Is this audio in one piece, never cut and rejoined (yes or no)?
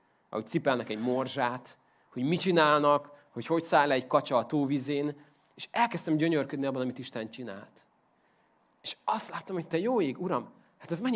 yes